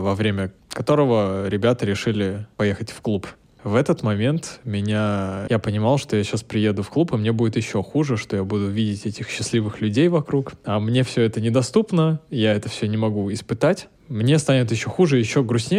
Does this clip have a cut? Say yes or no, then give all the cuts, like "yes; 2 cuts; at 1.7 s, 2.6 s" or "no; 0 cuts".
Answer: yes; 1 cut; at 5.5 s